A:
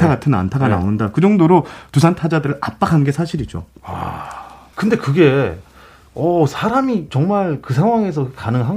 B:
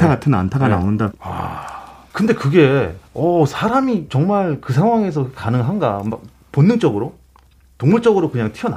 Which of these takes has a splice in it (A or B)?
B